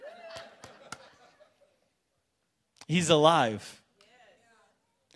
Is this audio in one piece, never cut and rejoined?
yes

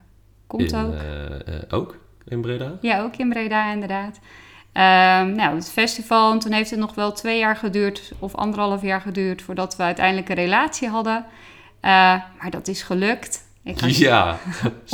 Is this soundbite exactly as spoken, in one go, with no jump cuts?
yes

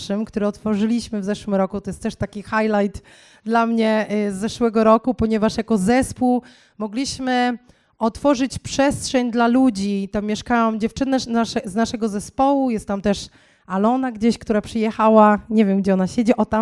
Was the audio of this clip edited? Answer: no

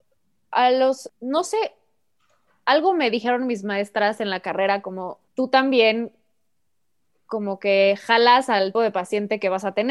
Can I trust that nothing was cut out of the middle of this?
no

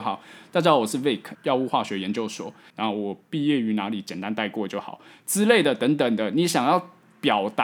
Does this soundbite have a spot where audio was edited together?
yes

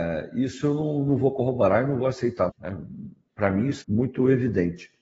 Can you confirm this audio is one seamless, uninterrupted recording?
no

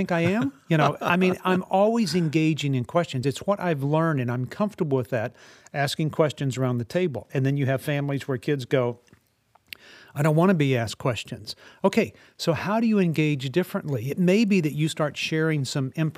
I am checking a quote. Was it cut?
no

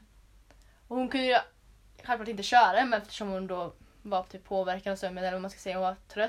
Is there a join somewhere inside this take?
no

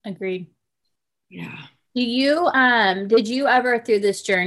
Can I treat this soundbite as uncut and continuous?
yes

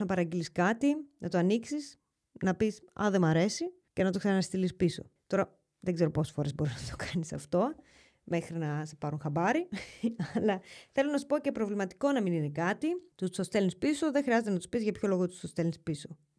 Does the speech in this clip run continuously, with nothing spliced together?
yes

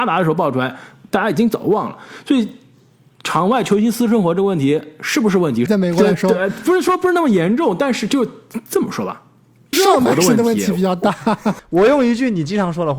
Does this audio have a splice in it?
yes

